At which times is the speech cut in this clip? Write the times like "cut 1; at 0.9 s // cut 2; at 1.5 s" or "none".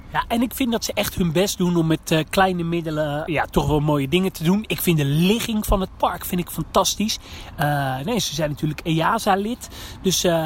cut 1; at 3.3 s